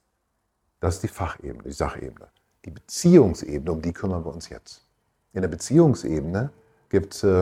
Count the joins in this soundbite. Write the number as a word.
zero